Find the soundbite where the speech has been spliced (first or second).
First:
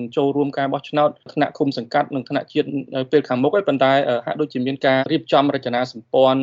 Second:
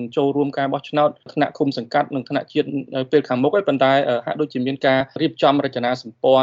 first